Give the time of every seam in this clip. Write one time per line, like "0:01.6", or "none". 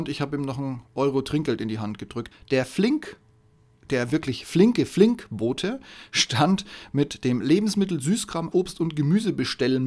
0:02.3
0:08.5